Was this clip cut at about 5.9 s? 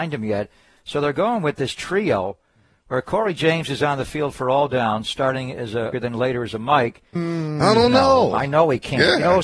yes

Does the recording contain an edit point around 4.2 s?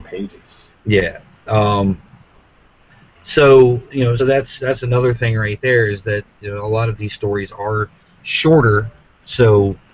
yes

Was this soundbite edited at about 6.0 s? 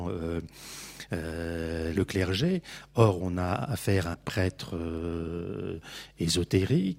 no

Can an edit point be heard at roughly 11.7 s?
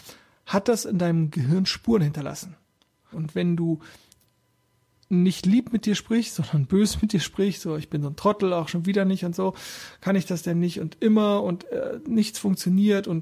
no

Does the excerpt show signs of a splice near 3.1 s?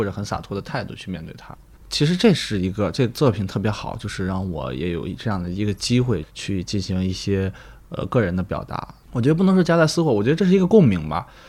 no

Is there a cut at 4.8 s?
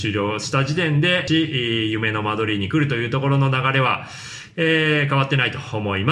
no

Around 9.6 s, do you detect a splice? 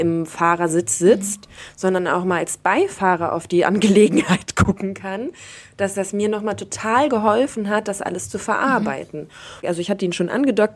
yes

